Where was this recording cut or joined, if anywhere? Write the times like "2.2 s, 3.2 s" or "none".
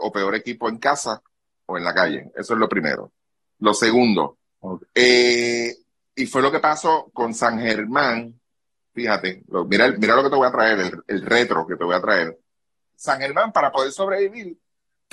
7.1 s, 12.9 s

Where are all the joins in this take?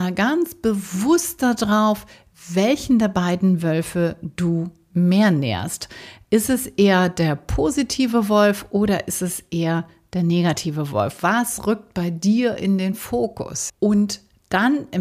11.2 s, 13.7 s

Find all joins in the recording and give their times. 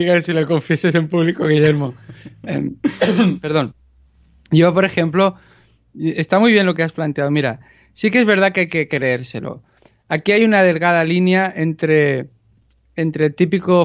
none

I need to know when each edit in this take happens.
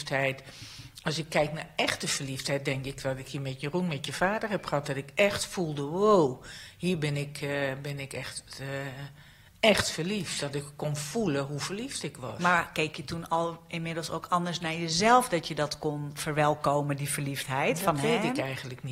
none

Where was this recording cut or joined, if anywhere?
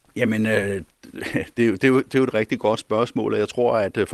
2.3 s

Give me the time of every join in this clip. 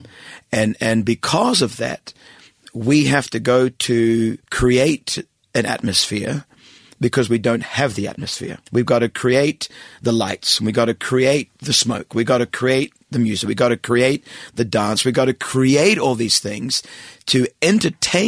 4.4 s, 8.7 s

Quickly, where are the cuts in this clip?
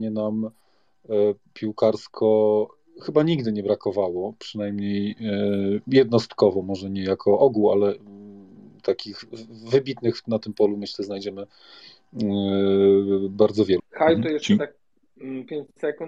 13.8 s

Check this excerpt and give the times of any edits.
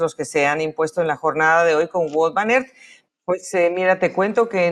3.0 s

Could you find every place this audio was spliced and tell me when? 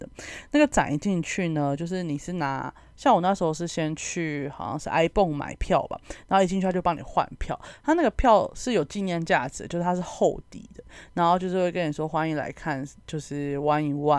none

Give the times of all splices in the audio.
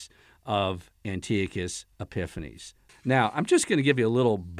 2.9 s

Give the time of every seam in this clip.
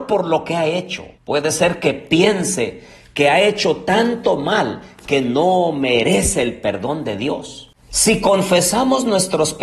1.1 s, 7.9 s

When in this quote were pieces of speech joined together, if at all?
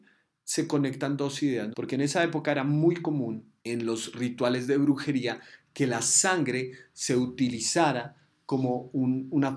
1.7 s, 3.6 s

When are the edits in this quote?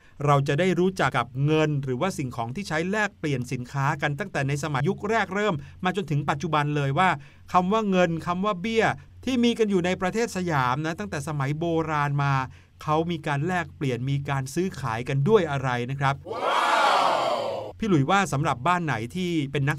1.1 s, 4.8 s

